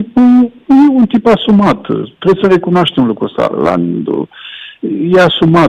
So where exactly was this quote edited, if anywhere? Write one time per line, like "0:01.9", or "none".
none